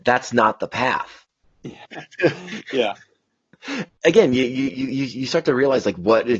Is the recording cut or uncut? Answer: cut